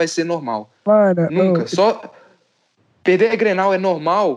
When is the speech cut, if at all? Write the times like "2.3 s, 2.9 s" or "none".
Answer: none